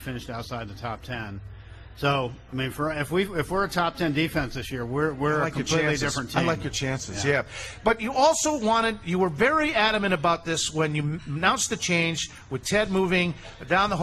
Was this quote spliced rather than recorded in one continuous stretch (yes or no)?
no